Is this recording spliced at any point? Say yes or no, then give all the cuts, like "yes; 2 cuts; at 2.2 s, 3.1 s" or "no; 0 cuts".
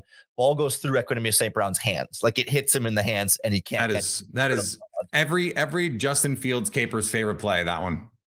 no; 0 cuts